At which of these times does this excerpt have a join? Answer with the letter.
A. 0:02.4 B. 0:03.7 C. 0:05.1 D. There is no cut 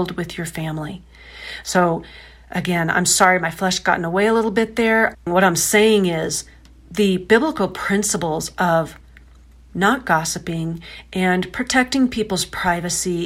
C